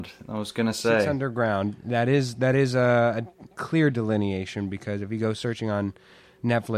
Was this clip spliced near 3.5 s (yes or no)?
yes